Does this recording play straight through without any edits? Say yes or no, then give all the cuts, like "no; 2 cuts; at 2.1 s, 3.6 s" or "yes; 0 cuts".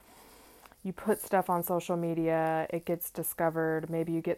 yes; 0 cuts